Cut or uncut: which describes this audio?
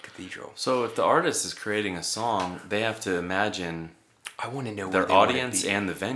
uncut